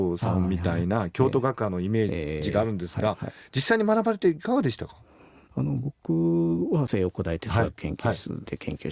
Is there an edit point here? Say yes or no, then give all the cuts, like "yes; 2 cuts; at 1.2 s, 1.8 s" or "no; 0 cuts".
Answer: no; 0 cuts